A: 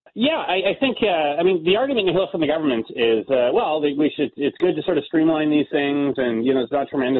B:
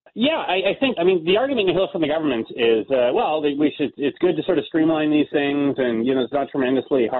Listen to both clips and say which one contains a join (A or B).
B